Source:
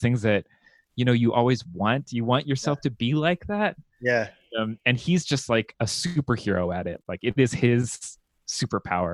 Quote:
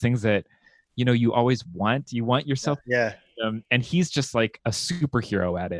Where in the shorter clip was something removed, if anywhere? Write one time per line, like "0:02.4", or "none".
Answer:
0:02.8